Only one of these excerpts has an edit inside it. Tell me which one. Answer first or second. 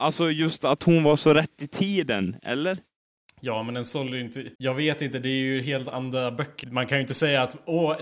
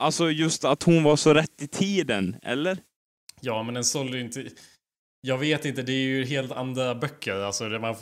first